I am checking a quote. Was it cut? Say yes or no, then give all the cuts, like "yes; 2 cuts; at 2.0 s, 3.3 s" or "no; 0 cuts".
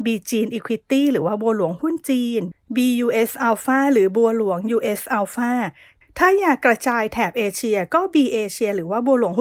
no; 0 cuts